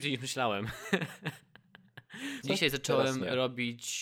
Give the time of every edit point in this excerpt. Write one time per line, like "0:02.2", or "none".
0:02.4